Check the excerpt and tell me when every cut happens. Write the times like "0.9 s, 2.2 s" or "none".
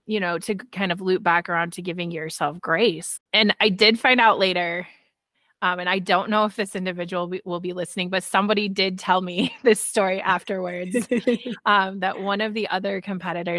3.2 s